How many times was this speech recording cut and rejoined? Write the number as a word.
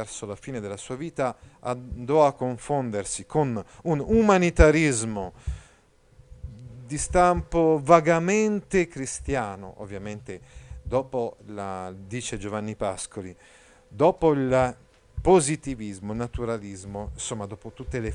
zero